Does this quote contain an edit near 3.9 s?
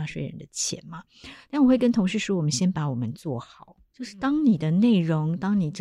yes; 1 cut; at 3.9 s

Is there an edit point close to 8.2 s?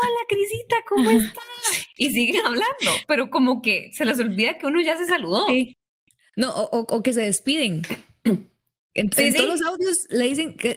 no; 0 cuts

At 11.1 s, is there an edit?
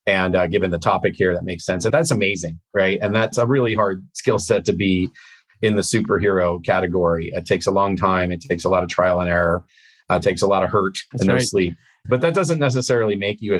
yes; 1 cut; at 11.1 s

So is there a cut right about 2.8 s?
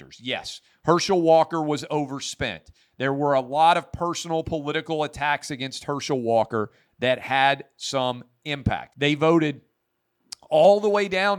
no; 1 cut; at 8.9 s

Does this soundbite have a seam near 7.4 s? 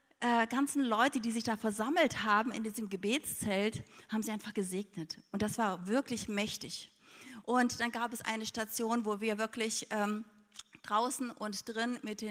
yes; 1 cut; at 7.4 s

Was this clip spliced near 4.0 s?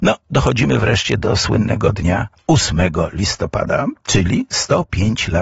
no; 0 cuts

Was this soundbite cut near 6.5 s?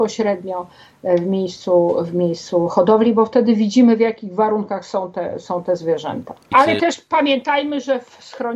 yes; 1 cut; at 6.5 s

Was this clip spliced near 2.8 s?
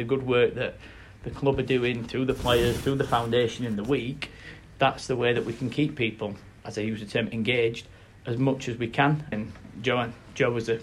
no; 2 cuts; at 6.6 s, 9.3 s

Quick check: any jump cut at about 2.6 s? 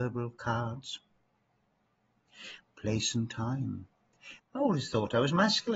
yes; 2 cuts; at 2.6 s, 4.4 s

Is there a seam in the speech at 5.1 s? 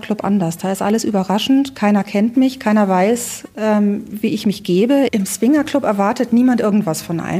yes; 1 cut; at 5.1 s

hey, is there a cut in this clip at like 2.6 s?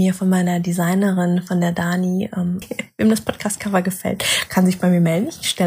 yes; 1 cut; at 2.6 s

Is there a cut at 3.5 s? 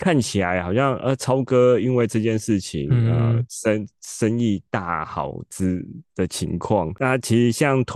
no; 0 cuts

